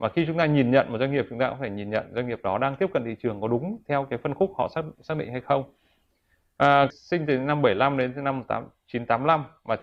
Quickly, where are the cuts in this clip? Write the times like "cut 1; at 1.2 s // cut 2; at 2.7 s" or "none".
cut 1; at 6.9 s

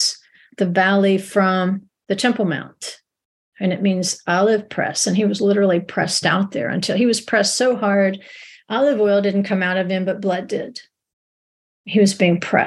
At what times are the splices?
none

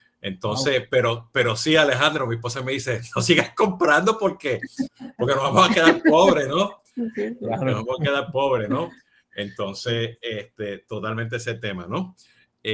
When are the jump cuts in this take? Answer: none

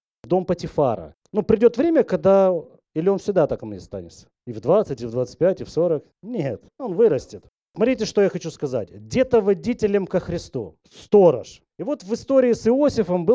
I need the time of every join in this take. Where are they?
cut 1; at 1.2 s

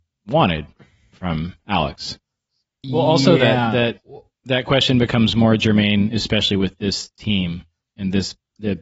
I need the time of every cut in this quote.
cut 1; at 2.8 s

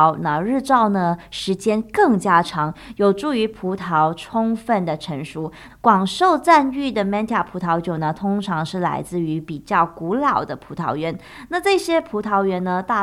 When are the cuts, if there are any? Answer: cut 1; at 5.7 s

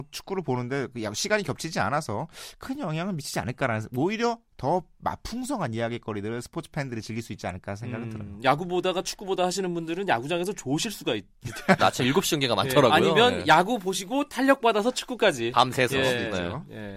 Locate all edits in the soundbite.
cut 1; at 11.8 s

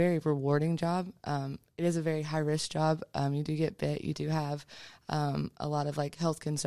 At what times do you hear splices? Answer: none

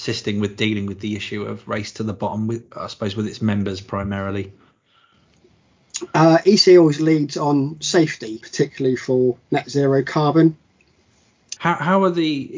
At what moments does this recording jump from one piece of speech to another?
cut 1; at 8.4 s // cut 2; at 11.6 s

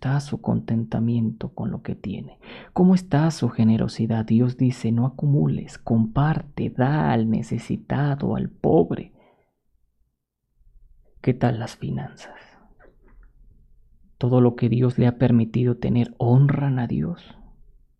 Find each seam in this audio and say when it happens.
cut 1; at 11.0 s

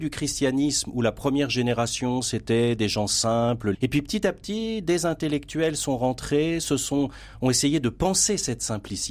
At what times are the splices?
cut 1; at 3.7 s

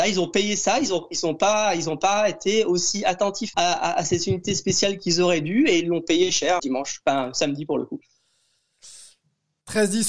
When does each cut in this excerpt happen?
cut 1; at 3.5 s // cut 2; at 6.6 s

